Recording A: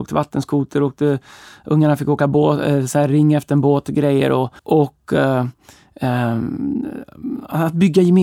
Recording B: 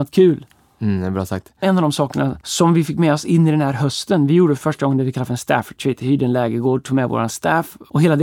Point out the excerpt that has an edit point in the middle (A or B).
A